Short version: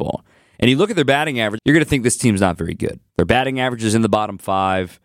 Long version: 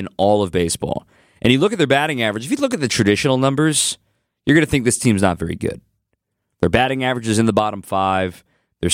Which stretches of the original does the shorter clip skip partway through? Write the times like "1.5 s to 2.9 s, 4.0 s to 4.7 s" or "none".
2.4 s to 4.4 s, 5.9 s to 6.5 s